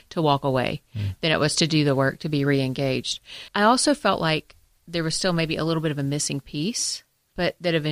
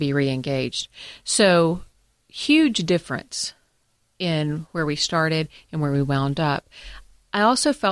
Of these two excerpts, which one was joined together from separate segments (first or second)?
first